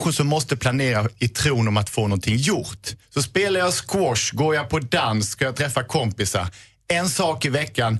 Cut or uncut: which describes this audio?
cut